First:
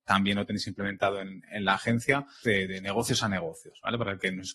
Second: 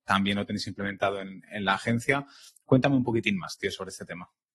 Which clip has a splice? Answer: first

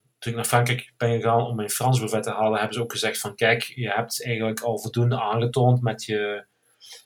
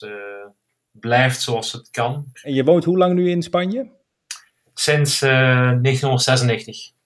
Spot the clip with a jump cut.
second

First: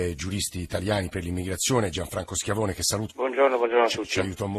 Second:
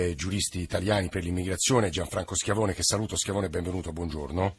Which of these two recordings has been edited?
first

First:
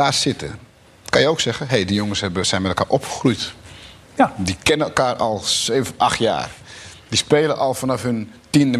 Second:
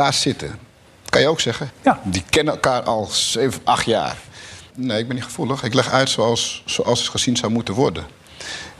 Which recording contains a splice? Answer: second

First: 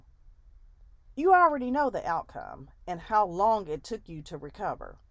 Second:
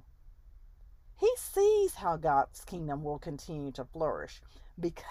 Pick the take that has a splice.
first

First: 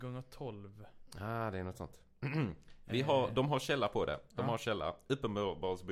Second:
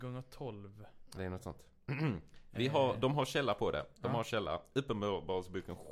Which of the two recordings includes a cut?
second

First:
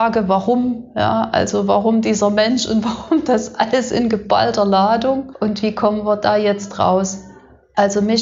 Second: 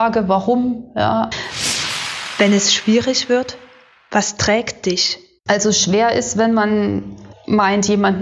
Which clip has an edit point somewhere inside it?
second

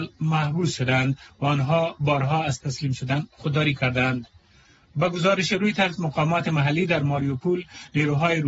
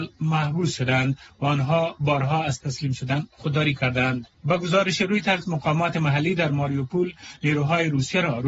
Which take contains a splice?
second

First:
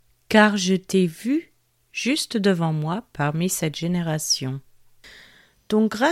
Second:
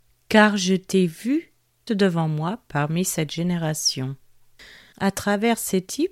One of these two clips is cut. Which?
second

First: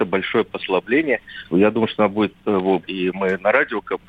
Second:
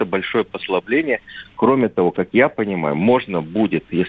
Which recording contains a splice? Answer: first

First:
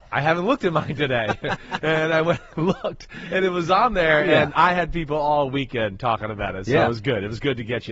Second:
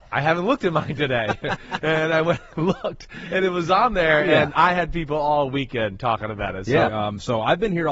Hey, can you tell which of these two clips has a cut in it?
second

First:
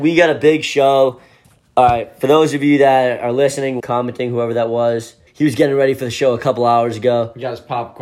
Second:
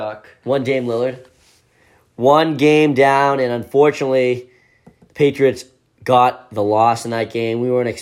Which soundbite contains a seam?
first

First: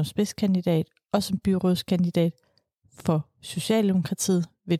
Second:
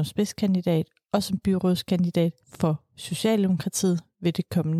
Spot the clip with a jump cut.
second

